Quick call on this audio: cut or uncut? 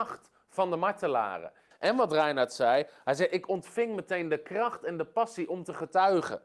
cut